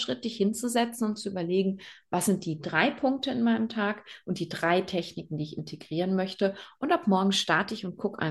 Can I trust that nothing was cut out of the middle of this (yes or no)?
yes